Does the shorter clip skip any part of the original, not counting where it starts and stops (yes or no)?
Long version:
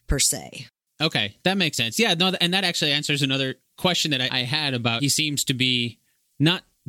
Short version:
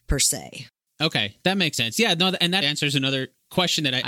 yes